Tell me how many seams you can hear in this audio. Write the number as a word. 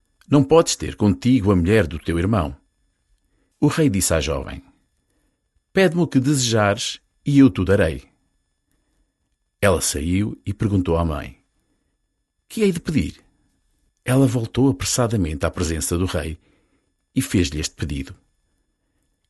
two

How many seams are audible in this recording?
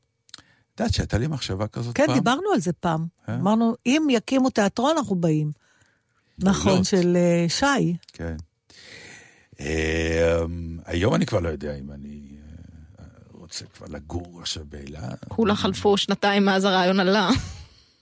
one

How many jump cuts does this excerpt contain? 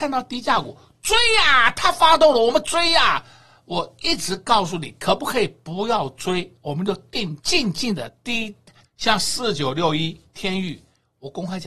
two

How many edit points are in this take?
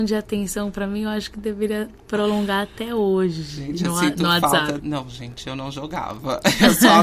one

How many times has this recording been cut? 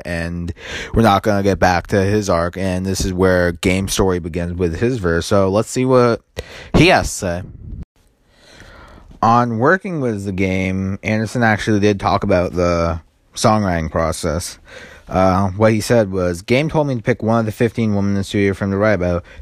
zero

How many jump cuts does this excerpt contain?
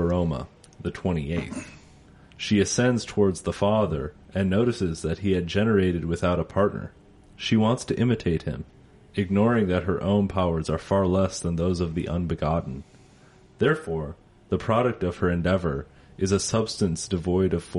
zero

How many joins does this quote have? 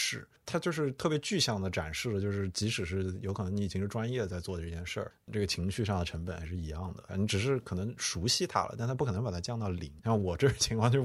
two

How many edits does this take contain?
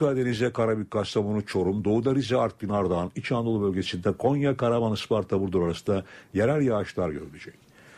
zero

